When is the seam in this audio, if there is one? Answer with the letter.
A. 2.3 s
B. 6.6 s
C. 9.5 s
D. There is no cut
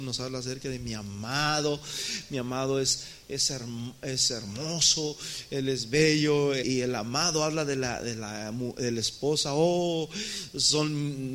B